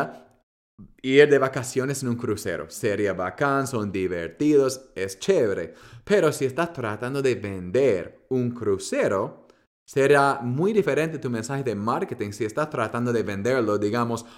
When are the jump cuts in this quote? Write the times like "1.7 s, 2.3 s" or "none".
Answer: none